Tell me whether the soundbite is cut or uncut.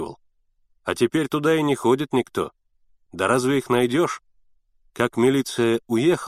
cut